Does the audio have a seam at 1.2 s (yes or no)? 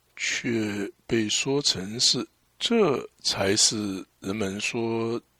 no